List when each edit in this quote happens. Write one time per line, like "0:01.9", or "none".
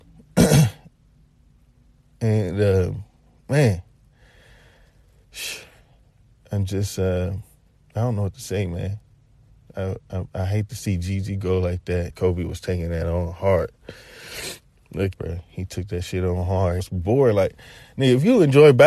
0:12.1
0:15.1
0:16.8